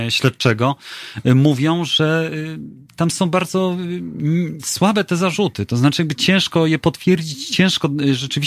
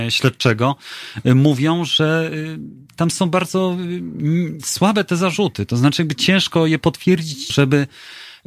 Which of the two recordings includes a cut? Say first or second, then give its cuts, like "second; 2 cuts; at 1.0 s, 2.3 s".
second; 1 cut; at 7.5 s